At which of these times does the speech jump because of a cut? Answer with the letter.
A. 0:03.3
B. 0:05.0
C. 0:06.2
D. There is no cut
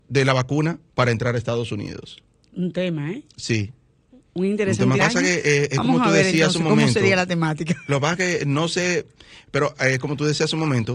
B